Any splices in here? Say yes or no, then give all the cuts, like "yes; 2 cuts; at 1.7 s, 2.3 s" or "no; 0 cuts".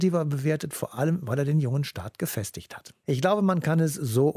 yes; 1 cut; at 3.0 s